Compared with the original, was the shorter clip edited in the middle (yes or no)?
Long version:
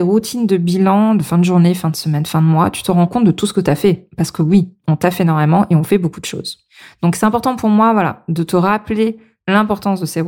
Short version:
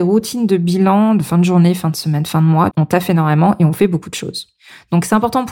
yes